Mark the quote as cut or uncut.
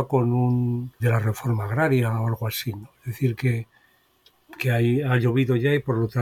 cut